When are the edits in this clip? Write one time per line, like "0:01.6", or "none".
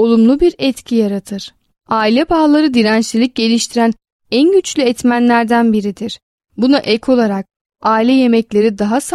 0:01.8
0:06.4

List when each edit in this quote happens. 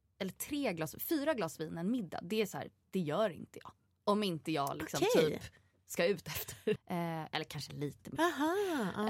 0:06.8
0:08.2

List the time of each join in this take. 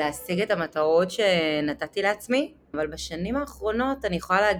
0:02.7

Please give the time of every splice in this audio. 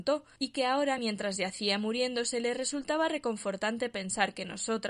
none

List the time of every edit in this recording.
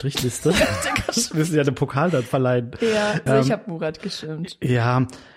0:03.3

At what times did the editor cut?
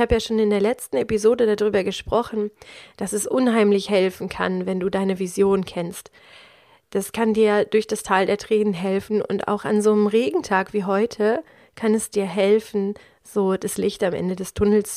none

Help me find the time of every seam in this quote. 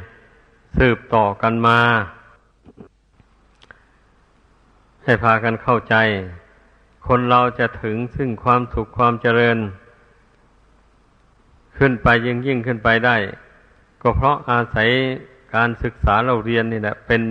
none

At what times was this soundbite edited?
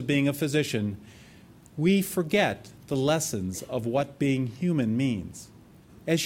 none

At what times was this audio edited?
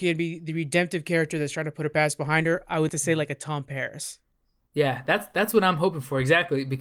0:02.9

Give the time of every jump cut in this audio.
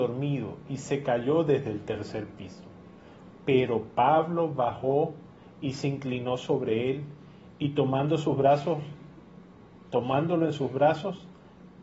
0:03.3

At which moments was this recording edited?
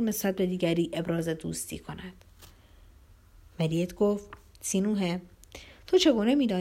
none

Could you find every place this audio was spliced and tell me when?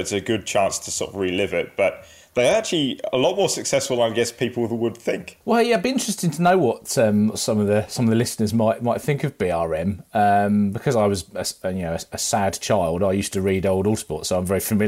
none

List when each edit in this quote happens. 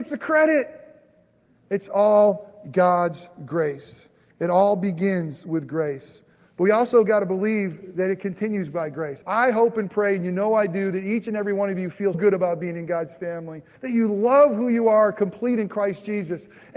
0:09.2
0:12.1
0:13.8

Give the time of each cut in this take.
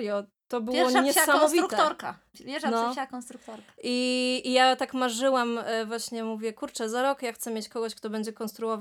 none

